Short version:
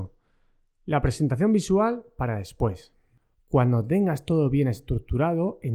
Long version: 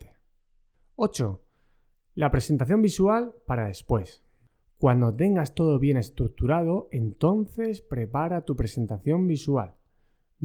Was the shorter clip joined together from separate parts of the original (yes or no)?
no